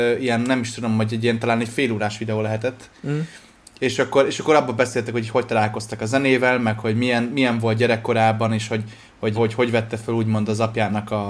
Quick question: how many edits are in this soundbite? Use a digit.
1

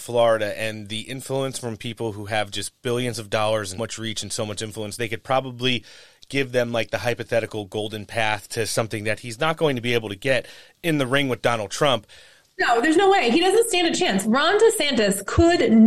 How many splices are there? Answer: 1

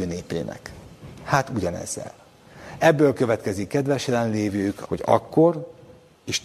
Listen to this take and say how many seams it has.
1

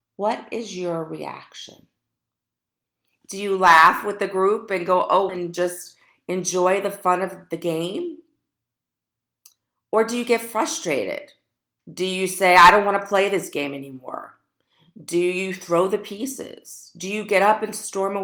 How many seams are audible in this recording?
2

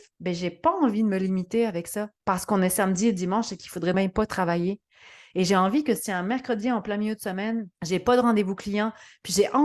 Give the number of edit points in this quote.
2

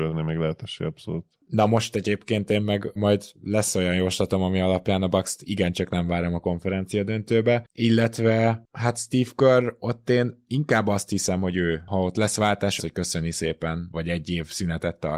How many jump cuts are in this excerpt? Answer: 2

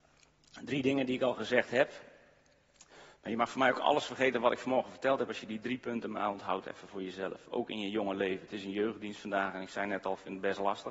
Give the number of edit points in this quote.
0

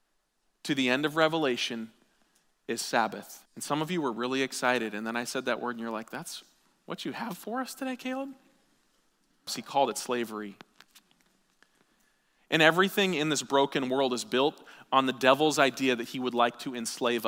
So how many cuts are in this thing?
2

